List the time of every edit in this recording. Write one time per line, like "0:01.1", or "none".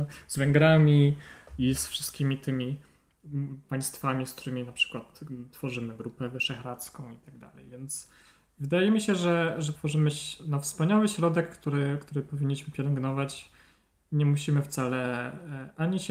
0:09.7